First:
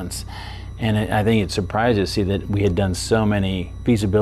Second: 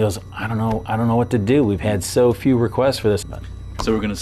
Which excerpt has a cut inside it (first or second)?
second